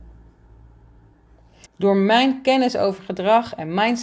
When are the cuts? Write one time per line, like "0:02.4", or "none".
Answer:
0:01.7